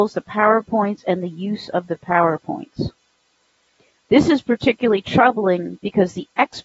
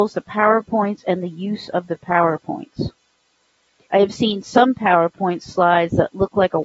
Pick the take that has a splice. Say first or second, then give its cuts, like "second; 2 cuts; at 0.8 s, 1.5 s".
second; 1 cut; at 3.9 s